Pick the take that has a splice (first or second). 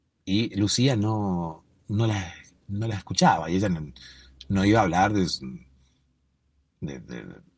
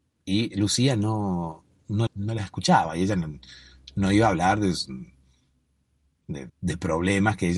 second